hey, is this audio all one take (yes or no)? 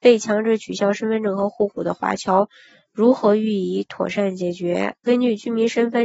yes